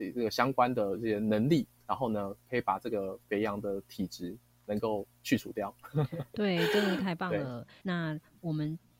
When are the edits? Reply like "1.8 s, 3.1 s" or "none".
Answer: 7.8 s